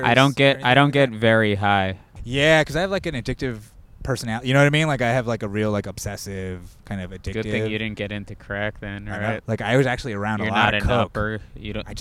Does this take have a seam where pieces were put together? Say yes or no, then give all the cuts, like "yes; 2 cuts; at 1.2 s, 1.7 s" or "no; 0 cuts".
yes; 2 cuts; at 2.2 s, 9.4 s